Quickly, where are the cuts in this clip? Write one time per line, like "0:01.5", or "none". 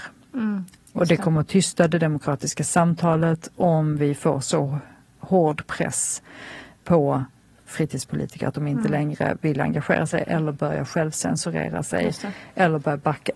none